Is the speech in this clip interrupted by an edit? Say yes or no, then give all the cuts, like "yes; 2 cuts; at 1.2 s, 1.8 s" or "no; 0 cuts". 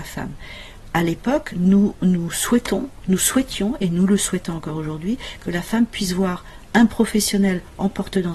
no; 0 cuts